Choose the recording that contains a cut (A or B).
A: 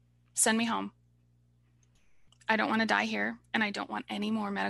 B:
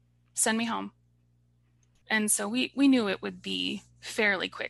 B